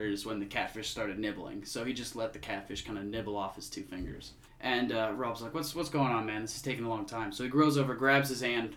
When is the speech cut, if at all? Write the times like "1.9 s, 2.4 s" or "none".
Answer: 4.5 s